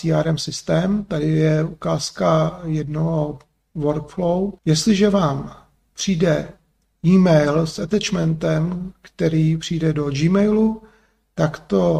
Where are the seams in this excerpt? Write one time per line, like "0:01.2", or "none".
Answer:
0:04.6